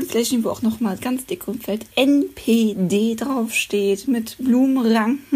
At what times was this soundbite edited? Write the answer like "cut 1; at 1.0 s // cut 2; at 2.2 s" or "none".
none